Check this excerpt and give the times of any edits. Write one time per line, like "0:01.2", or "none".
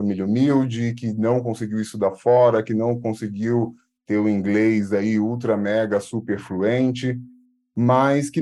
none